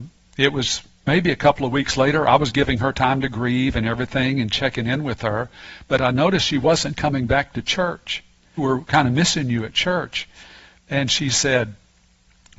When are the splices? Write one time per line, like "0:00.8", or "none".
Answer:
0:08.6